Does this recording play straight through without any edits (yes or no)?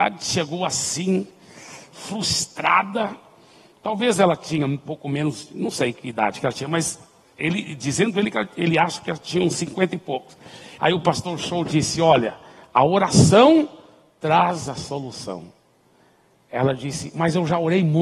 no